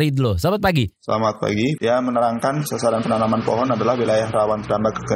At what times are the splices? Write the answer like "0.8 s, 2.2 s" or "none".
1.8 s